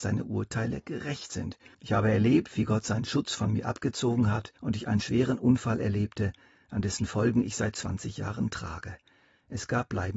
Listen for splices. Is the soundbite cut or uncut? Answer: cut